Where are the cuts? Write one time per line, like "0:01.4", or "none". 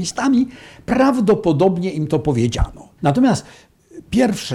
0:03.0